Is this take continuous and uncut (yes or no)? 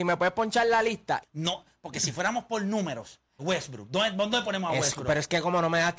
no